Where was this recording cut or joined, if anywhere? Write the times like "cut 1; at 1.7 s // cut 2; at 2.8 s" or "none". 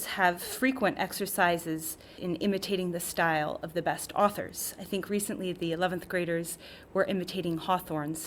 cut 1; at 2.2 s